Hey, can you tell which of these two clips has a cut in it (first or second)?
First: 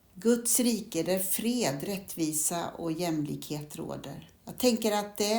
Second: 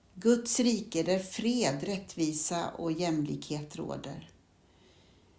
first